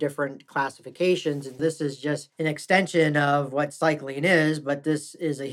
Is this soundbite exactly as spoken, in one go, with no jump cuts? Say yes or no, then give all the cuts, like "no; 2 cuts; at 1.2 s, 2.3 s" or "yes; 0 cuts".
no; 1 cut; at 1.6 s